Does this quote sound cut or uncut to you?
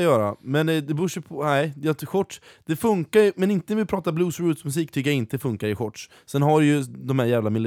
uncut